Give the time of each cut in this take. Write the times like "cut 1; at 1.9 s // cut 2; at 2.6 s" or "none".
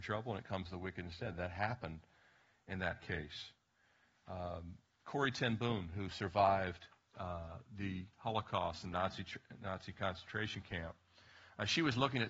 none